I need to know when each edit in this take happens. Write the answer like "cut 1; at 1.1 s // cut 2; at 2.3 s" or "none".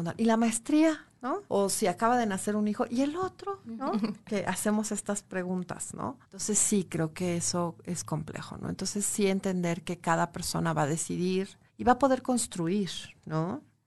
cut 1; at 1.5 s // cut 2; at 6.2 s // cut 3; at 11.7 s